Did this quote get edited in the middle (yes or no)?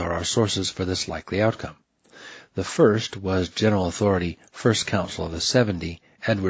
no